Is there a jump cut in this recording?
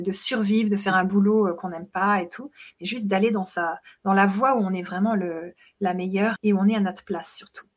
yes; 1 cut; at 6.4 s

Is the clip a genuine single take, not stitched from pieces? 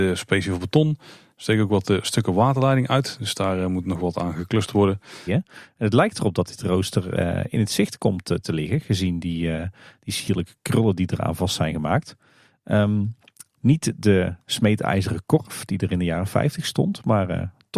no; 1 cut; at 5.3 s

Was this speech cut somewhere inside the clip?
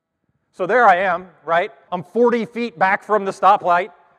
yes; 1 cut; at 1.9 s

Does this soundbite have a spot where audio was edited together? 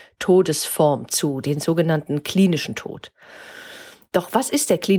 no; 0 cuts

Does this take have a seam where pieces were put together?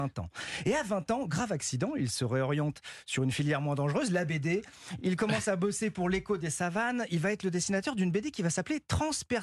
no; 0 cuts

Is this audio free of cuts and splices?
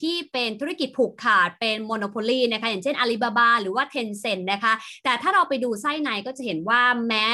yes; 0 cuts

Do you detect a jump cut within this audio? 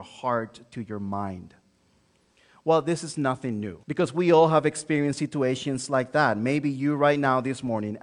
yes; 1 cut; at 3.8 s

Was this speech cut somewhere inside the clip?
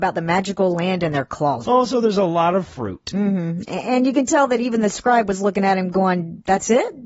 yes; 1 cut; at 1.6 s

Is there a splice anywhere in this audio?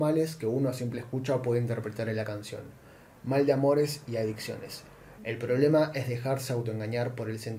yes; 1 cut; at 5.2 s

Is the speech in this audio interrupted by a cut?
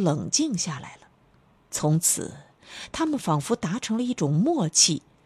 yes; 1 cut; at 1.6 s

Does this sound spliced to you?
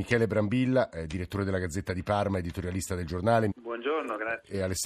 yes; 1 cut; at 3.5 s

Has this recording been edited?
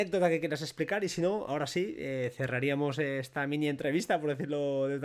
no; 0 cuts

